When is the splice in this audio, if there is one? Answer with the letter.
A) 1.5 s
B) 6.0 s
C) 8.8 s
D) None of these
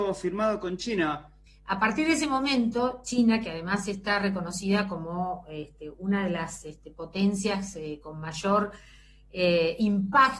A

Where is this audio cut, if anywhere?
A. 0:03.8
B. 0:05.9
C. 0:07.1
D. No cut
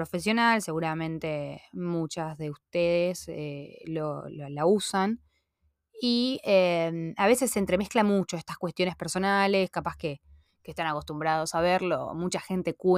D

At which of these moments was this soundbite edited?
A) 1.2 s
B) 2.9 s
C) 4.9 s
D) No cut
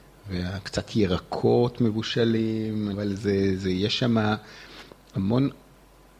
B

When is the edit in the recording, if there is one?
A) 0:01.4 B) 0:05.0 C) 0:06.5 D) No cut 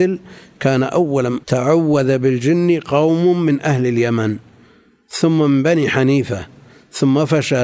A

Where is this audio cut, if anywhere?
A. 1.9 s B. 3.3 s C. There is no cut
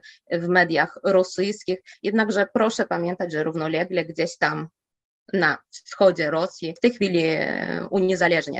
A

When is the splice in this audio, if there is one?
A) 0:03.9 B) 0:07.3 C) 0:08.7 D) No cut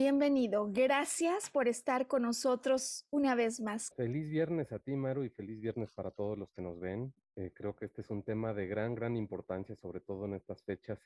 A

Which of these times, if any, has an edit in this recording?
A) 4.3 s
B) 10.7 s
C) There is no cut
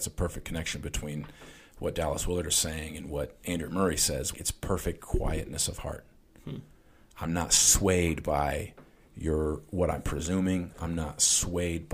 A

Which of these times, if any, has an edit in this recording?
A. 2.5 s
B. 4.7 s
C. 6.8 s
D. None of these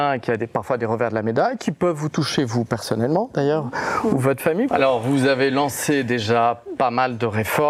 B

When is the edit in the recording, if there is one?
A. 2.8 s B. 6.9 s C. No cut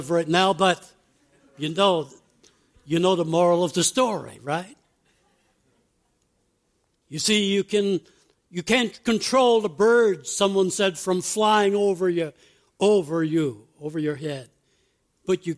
B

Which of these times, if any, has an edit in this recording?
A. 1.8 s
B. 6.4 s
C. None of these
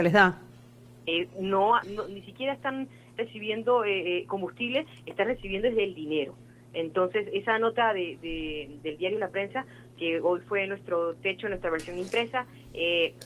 A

